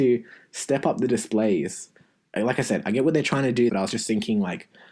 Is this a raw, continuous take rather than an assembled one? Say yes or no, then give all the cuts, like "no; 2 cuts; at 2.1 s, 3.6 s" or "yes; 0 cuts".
no; 1 cut; at 3.7 s